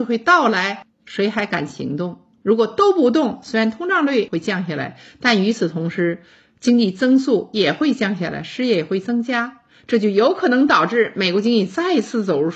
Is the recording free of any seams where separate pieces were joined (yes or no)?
yes